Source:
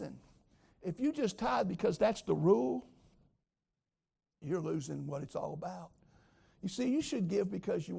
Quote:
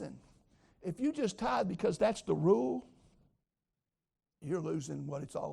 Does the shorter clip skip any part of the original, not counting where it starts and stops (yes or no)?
no